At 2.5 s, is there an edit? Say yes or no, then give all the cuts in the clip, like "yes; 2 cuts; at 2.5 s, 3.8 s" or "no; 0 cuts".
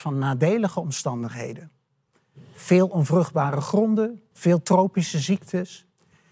no; 1 cut; at 4.3 s